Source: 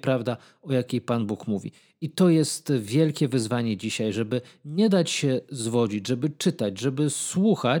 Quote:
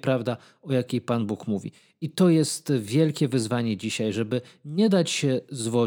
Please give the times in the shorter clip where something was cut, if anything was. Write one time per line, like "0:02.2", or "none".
none